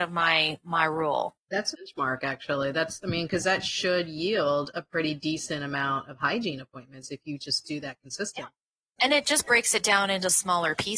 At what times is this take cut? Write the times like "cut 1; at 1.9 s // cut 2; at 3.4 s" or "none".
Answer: cut 1; at 1.7 s